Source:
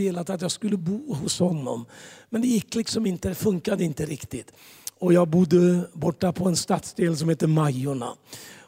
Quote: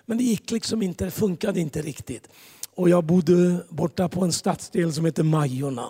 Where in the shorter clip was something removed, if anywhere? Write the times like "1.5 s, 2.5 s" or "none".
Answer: none

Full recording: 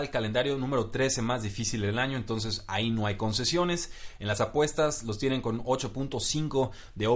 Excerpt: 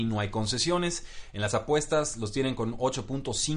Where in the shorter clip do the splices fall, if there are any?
none

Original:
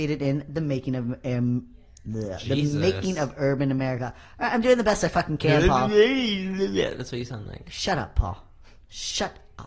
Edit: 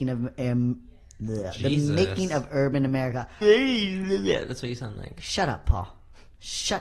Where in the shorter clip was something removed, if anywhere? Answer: 3.4 s

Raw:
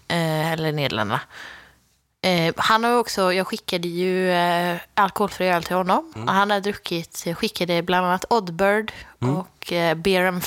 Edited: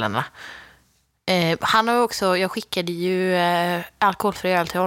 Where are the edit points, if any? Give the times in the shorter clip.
none

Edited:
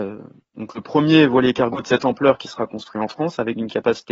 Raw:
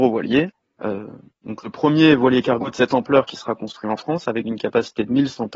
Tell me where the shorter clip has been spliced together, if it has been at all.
none

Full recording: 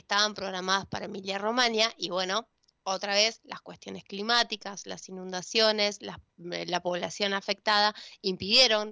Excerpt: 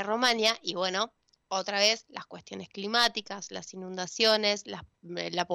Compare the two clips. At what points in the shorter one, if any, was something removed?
none

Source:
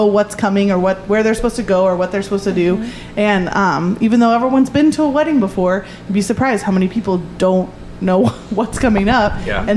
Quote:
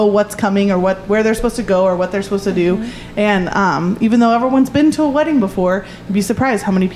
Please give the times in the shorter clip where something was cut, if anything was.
none

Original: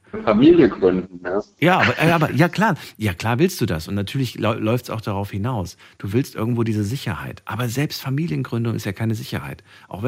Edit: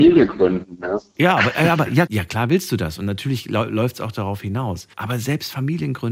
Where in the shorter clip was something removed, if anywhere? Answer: 2.1 s, 4.9 s

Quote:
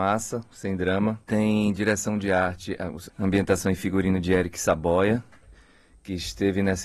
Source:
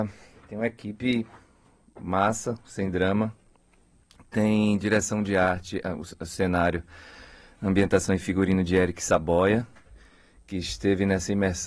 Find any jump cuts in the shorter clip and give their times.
1.2 s, 3.1 s

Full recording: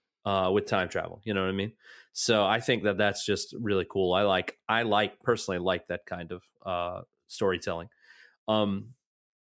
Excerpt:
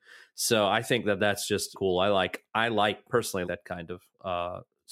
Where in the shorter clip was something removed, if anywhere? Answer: 1.7 s, 3.4 s

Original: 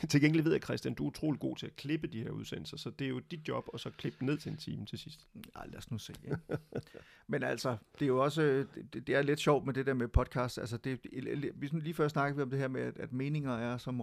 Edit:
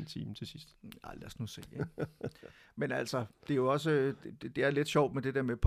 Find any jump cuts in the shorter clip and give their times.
none

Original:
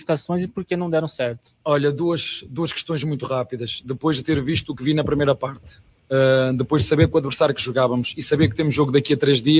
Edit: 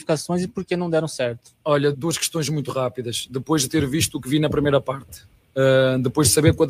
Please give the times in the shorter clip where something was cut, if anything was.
1.9 s

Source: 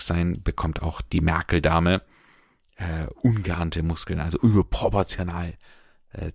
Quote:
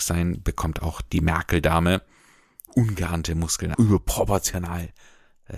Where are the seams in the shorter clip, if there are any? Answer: 2.7 s, 3.7 s

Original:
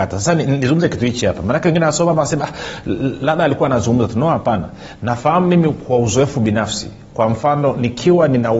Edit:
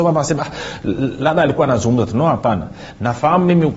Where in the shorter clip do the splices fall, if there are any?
none

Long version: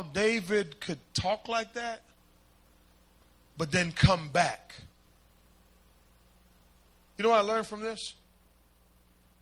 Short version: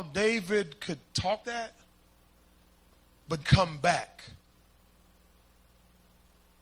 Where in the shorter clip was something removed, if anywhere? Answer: 1.4 s, 3.4 s

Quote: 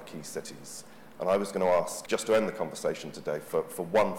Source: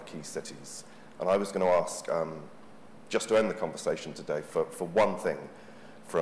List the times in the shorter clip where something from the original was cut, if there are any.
2.1 s

